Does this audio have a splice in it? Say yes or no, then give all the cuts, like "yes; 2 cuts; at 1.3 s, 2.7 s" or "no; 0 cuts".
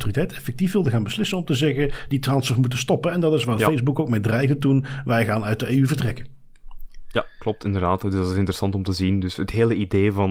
no; 0 cuts